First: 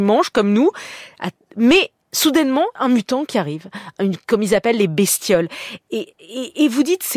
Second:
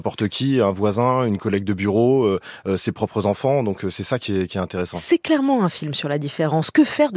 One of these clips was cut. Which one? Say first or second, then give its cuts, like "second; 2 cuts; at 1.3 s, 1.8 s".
first; 1 cut; at 2.7 s